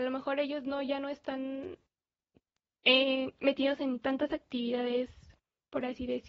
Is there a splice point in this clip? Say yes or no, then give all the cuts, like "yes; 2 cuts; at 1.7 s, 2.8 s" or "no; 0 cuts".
no; 0 cuts